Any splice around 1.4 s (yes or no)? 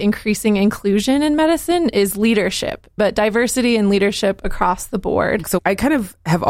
no